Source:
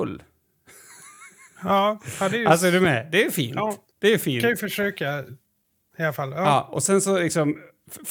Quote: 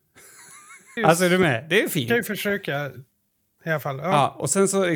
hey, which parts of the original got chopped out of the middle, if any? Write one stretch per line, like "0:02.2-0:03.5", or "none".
0:01.5-0:02.4
0:03.5-0:04.4